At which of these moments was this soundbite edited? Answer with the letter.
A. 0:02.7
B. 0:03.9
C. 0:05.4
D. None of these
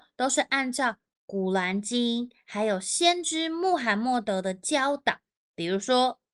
D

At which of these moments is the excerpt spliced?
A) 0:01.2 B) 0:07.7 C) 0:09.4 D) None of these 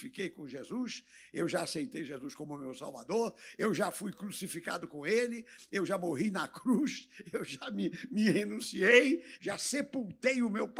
C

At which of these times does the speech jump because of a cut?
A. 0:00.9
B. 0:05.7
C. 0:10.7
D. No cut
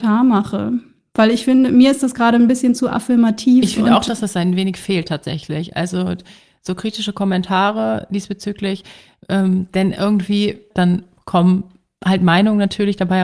C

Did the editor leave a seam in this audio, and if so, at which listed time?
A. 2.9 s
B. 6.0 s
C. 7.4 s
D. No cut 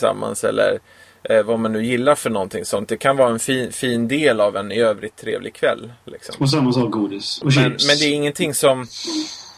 C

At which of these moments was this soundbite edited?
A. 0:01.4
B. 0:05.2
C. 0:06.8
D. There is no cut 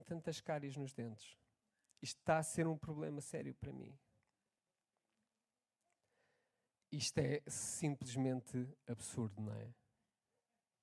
D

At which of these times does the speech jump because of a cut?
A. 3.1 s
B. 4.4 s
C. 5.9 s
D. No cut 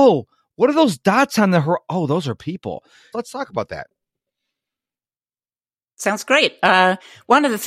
A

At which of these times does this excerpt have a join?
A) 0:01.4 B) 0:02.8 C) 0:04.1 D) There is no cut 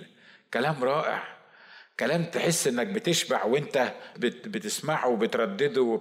C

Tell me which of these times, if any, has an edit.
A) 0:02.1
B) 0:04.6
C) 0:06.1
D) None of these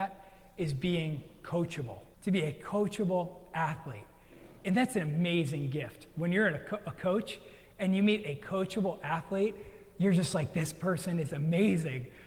A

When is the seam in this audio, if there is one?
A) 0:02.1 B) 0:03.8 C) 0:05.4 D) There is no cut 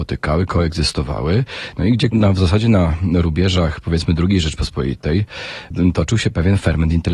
A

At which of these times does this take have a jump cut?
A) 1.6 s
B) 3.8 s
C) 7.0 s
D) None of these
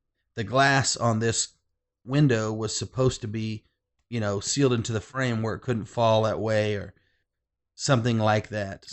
D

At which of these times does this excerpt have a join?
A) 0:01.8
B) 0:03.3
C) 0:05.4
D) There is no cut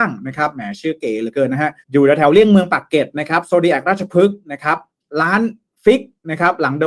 A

